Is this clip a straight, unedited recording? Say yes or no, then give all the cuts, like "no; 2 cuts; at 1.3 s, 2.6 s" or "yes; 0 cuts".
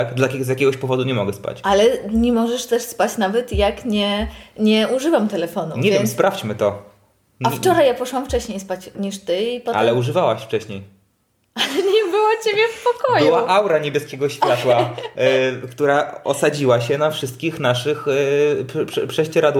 yes; 0 cuts